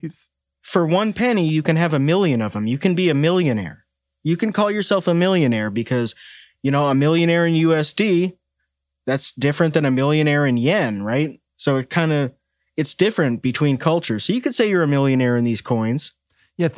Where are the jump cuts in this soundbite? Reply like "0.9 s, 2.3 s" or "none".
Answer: 11.5 s